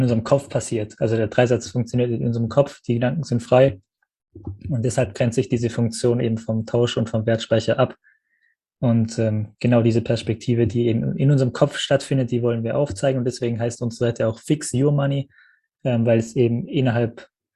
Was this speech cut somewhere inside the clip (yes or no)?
no